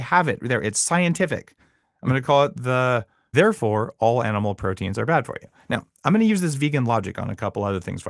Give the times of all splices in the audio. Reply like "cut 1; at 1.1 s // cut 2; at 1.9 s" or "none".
cut 1; at 3.3 s